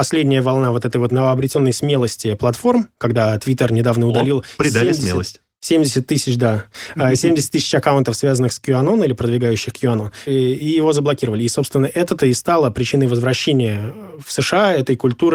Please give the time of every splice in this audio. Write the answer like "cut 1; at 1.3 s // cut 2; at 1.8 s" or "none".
cut 1; at 10.3 s

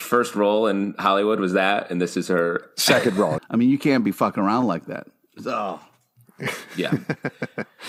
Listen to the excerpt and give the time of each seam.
cut 1; at 3.4 s

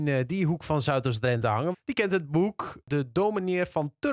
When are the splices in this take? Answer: cut 1; at 1.7 s

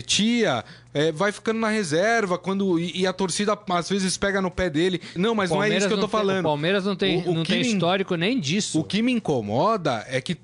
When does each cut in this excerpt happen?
cut 1; at 5.2 s

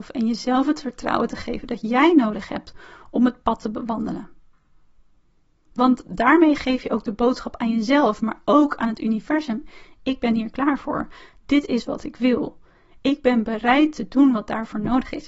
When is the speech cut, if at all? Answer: none

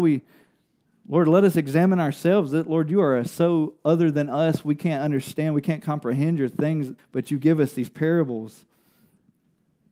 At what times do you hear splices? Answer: cut 1; at 7.0 s

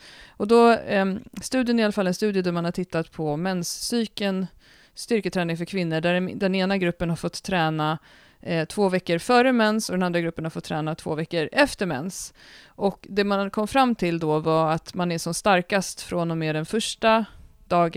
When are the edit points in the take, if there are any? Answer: none

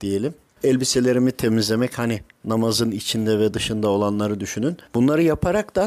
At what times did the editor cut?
none

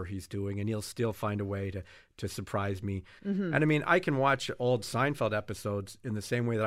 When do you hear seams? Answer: cut 1; at 3.2 s

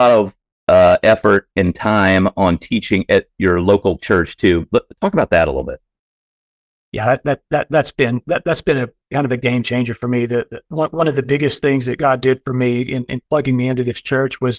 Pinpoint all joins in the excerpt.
none

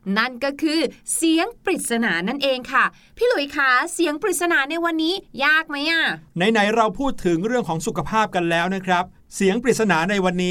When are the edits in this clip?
cut 1; at 6.3 s

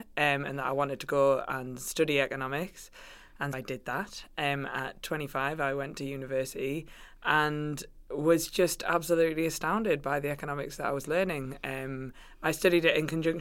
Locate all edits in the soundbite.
cut 1; at 3.5 s

